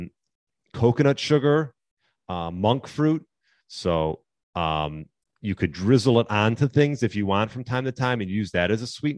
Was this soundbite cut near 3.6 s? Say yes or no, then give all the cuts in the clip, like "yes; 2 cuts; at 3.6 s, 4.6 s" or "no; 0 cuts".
yes; 1 cut; at 3.6 s